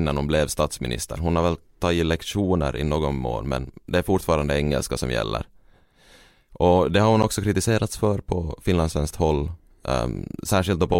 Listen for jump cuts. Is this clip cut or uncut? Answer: uncut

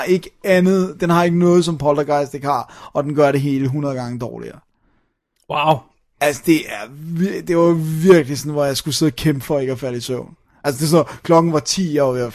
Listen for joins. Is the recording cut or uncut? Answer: uncut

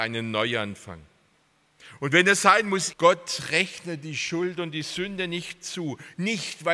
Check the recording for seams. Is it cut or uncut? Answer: cut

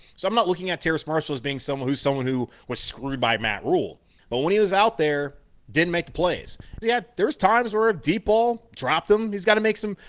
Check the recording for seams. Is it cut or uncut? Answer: cut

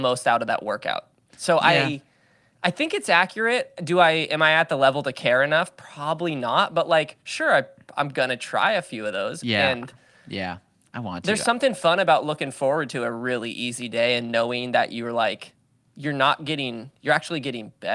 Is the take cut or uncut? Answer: uncut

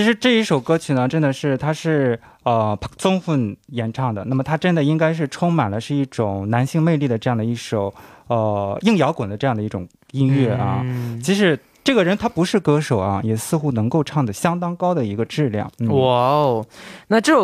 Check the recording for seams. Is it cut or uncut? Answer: uncut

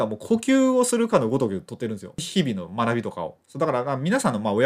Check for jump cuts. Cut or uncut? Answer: uncut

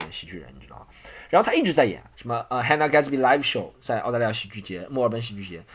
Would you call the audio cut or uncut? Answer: cut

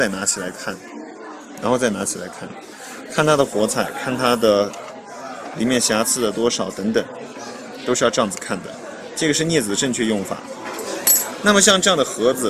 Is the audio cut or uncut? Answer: uncut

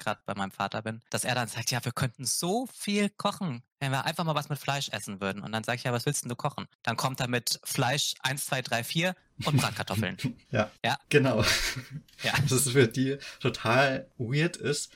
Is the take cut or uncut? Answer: cut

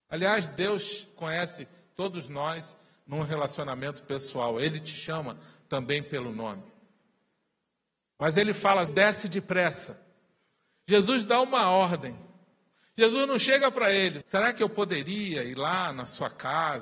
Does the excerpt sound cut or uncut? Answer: cut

